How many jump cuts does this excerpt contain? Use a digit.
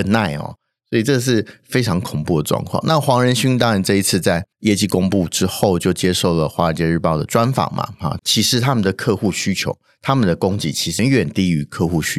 3